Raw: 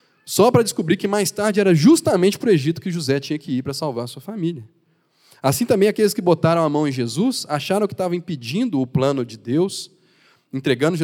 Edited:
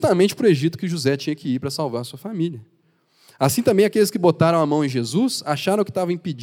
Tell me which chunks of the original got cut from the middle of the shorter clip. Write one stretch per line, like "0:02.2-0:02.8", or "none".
none